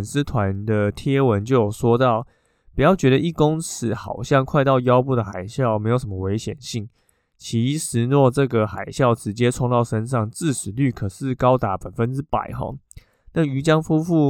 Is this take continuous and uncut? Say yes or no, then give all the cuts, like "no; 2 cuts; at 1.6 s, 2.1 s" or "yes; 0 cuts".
yes; 0 cuts